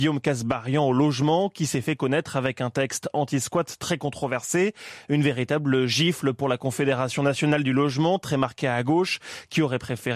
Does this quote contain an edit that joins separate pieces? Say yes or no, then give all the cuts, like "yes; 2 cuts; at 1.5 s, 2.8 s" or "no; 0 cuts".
no; 0 cuts